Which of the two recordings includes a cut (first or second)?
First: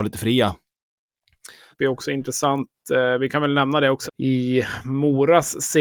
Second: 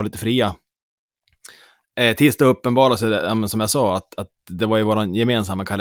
first